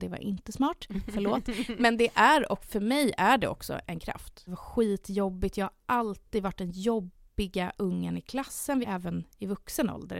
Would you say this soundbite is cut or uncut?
cut